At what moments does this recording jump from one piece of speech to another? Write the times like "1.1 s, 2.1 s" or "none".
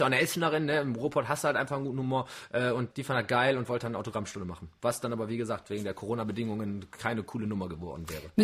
2.9 s